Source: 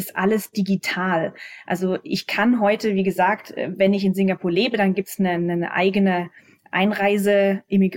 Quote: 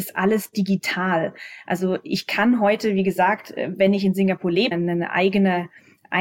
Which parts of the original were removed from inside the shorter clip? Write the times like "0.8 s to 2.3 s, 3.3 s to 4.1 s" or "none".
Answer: 4.7 s to 5.3 s